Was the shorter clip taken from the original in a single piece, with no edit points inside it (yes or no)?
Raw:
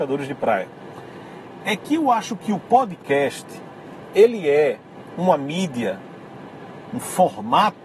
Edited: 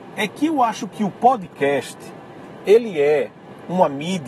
yes